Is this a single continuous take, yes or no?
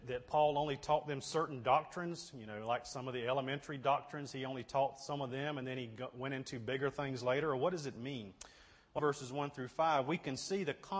no